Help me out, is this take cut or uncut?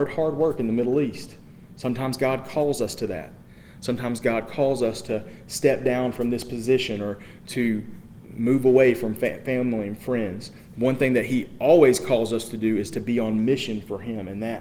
uncut